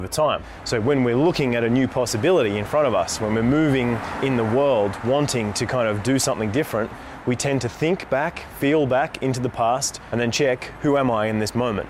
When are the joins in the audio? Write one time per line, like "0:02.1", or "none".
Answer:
none